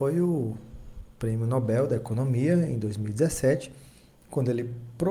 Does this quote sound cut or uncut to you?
uncut